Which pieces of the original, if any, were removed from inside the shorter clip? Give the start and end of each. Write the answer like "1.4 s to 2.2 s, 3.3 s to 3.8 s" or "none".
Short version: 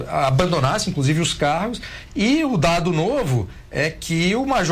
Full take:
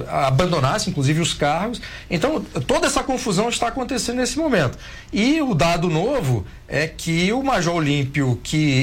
2.1 s to 5.0 s